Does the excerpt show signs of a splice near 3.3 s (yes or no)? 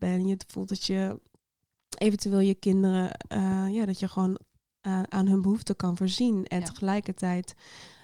no